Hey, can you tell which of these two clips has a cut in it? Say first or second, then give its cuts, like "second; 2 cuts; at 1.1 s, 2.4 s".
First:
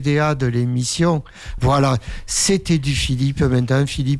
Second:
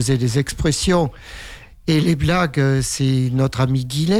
first; 1 cut; at 1.6 s